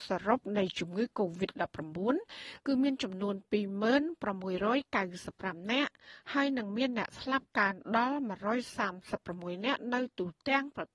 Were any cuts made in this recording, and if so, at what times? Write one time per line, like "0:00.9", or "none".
none